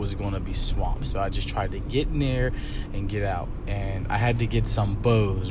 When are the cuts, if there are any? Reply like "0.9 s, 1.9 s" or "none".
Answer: none